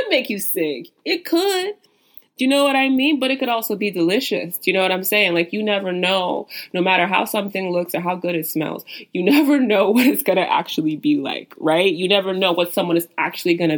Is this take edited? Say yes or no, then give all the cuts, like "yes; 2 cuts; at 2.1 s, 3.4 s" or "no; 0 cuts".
no; 0 cuts